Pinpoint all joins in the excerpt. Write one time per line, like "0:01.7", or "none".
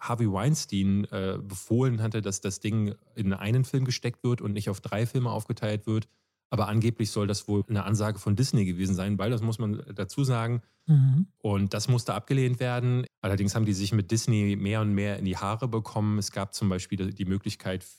0:10.8
0:13.1